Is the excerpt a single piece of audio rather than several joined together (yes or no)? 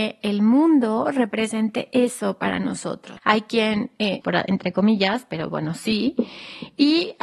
no